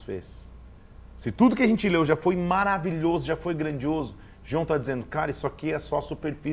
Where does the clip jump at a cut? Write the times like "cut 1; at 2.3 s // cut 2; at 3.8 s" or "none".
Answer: none